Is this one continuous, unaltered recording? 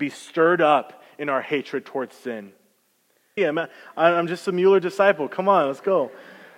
no; 1 cut; at 3.4 s

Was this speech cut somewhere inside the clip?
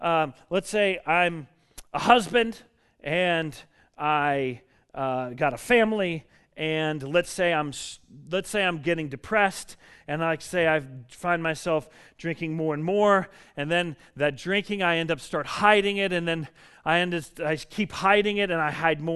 no; 0 cuts

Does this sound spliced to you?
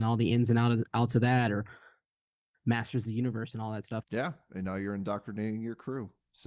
yes; 1 cut; at 4.0 s

